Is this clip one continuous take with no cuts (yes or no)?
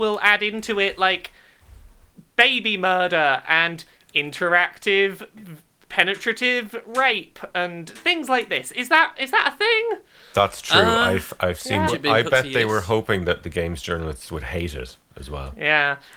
no